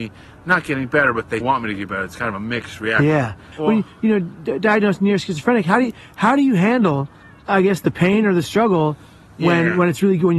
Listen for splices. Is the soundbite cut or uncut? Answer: cut